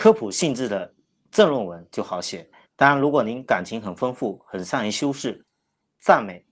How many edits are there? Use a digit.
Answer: 1